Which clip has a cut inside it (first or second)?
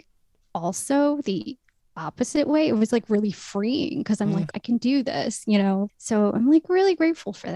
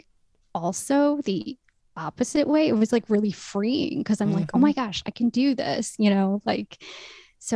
first